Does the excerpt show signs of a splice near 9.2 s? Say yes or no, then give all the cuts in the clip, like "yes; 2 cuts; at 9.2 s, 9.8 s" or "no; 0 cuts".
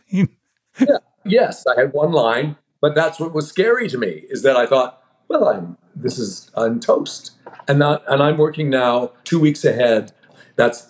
yes; 1 cut; at 9.2 s